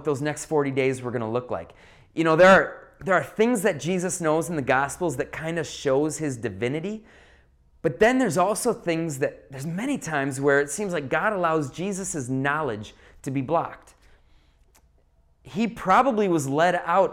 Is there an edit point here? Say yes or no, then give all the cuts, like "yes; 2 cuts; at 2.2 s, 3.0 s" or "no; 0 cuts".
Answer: no; 0 cuts